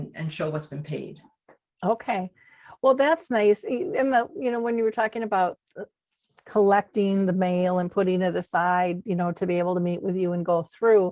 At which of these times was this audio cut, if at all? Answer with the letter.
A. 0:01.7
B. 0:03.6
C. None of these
C